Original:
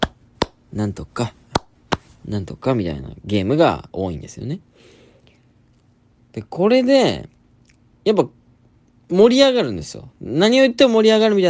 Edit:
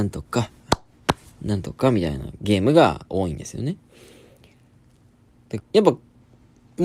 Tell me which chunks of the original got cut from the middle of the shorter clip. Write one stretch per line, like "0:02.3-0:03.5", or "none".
0:06.4-0:07.9